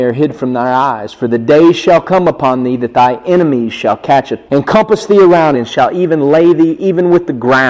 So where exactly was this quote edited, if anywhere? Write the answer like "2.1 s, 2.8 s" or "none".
4.5 s, 5.5 s